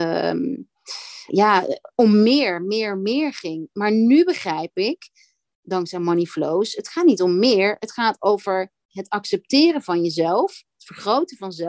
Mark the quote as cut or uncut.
cut